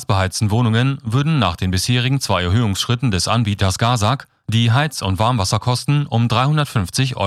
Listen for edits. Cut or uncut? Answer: uncut